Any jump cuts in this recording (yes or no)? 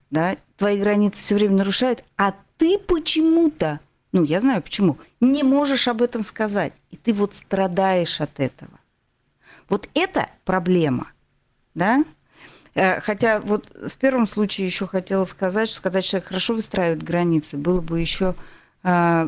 no